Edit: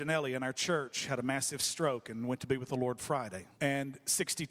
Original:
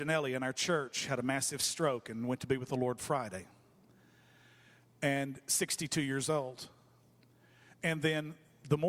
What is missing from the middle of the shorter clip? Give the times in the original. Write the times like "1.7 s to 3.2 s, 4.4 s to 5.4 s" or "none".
3.5 s to 5.0 s